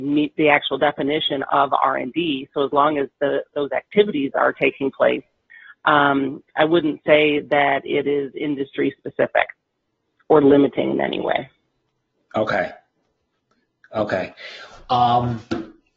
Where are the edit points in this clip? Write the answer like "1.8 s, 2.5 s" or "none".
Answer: none